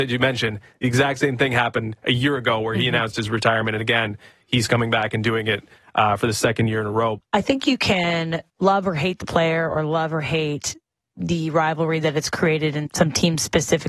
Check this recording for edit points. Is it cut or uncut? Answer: cut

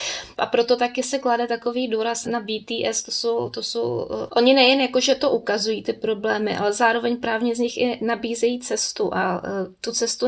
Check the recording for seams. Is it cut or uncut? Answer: cut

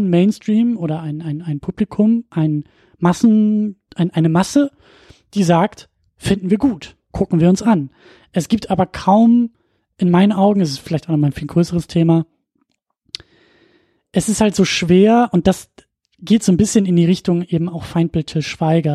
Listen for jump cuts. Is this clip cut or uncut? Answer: uncut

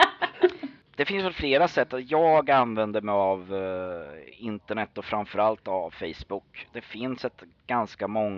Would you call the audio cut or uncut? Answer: uncut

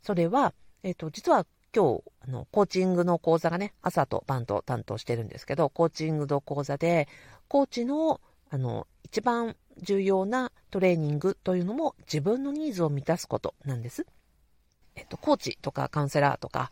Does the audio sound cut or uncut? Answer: cut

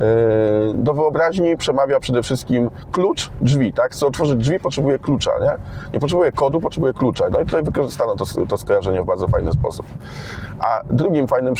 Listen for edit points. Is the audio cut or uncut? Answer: uncut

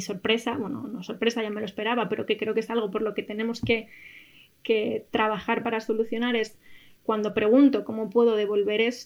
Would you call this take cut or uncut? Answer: uncut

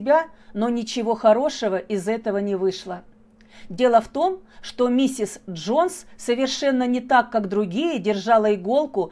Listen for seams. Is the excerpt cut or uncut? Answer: uncut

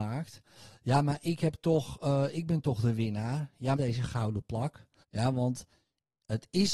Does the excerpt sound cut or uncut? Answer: cut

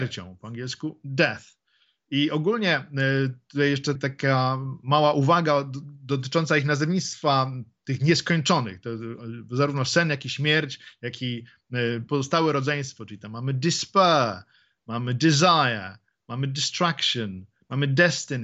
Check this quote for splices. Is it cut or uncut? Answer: cut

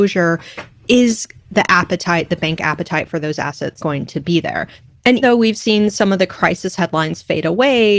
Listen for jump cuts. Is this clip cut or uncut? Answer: cut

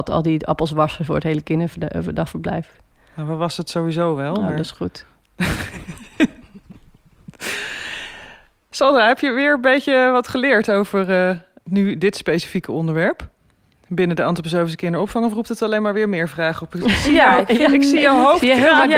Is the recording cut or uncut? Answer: uncut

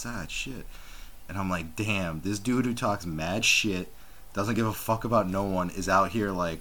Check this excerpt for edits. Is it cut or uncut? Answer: cut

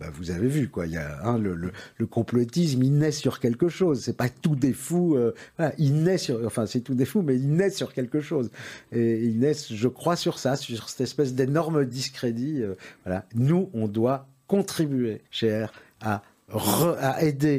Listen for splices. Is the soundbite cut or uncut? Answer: cut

